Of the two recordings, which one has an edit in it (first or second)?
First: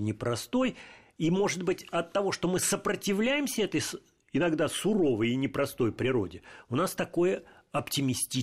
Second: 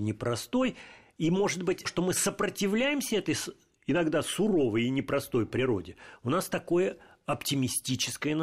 second